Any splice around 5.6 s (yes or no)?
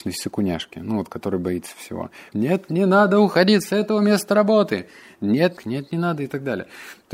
yes